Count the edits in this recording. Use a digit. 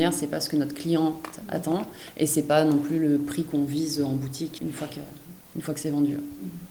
1